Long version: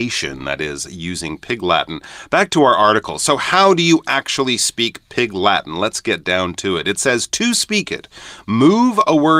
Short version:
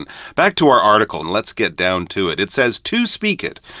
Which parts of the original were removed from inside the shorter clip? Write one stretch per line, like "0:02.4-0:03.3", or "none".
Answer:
0:03.2-0:05.7

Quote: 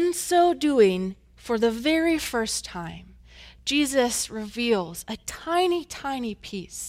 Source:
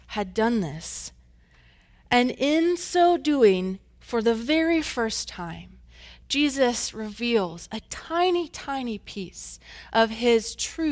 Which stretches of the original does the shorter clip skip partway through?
none

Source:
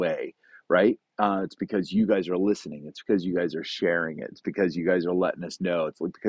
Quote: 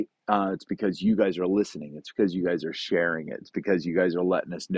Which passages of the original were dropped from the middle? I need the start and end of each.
none

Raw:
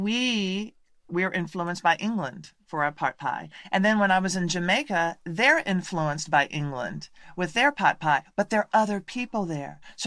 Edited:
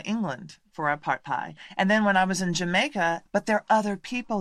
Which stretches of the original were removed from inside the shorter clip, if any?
0:05.2-0:08.3

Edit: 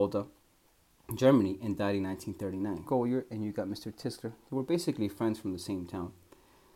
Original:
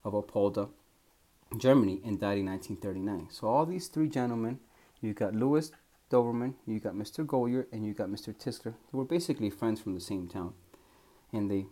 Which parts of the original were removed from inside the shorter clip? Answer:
0:03.3-0:07.3

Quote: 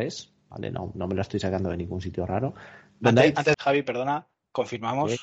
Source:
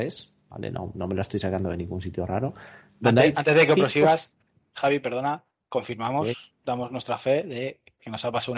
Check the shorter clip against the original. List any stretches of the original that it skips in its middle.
0:03.5-0:04.7

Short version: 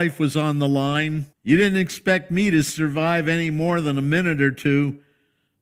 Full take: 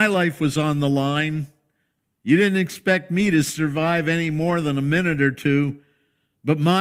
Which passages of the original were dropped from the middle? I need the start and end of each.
0:01.5-0:02.1

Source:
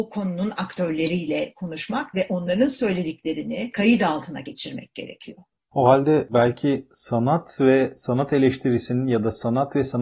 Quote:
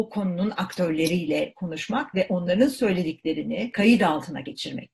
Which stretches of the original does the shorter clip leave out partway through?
none

